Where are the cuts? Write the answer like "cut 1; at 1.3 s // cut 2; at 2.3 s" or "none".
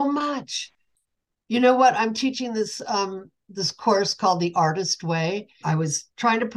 cut 1; at 5.6 s